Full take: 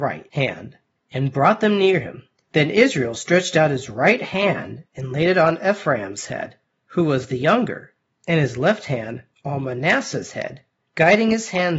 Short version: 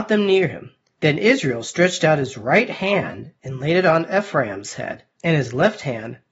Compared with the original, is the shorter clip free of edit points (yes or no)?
no